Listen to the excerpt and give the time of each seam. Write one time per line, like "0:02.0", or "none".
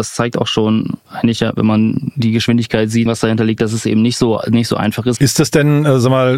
0:03.1
0:05.2